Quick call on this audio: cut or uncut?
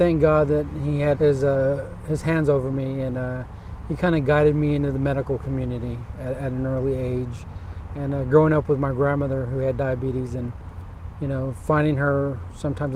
cut